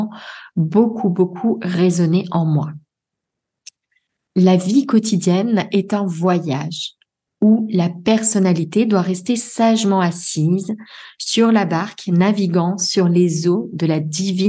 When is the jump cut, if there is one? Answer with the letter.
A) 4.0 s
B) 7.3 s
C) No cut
C